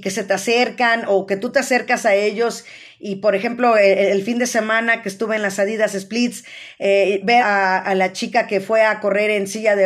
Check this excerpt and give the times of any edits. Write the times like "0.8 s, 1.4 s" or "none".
7.4 s